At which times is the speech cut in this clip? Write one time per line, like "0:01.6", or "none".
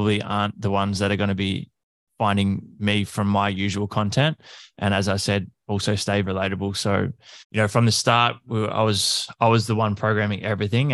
0:04.7
0:06.2
0:07.4